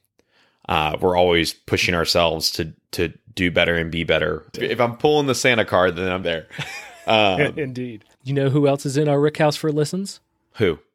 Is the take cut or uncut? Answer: cut